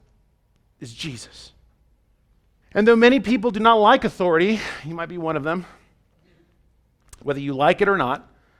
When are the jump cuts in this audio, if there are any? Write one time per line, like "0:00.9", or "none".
0:02.6